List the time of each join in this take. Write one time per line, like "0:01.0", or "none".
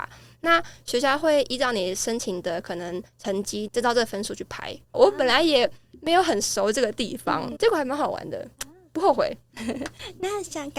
0:03.7
0:04.9
0:07.6